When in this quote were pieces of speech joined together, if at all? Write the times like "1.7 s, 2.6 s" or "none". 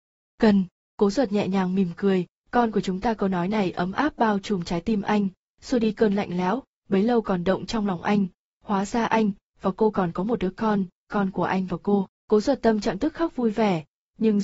12.1 s